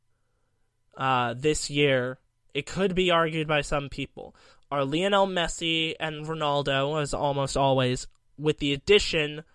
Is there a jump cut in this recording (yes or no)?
no